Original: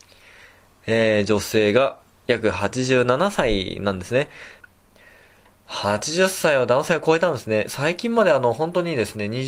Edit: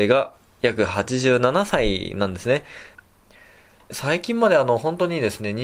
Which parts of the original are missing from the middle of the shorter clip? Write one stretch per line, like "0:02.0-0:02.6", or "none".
0:05.6-0:07.7